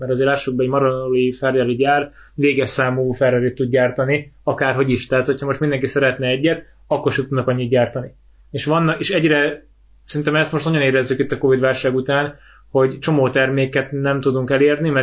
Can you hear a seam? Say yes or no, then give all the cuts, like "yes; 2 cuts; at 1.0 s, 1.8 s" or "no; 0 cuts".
no; 0 cuts